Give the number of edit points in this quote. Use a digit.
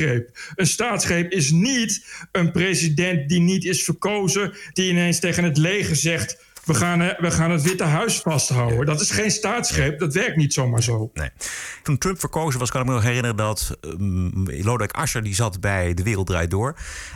1